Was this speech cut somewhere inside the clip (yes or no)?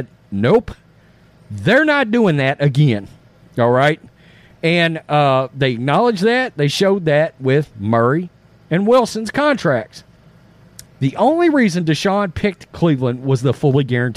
yes